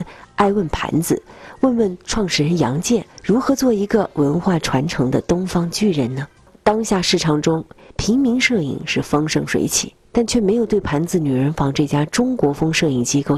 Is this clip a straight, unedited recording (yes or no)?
yes